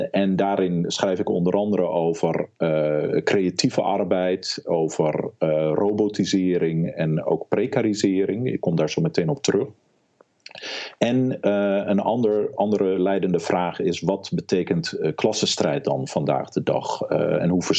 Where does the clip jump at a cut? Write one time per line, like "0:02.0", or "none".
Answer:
none